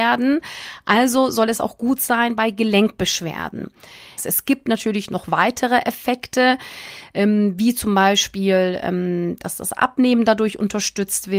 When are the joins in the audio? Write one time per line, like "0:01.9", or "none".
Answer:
0:04.2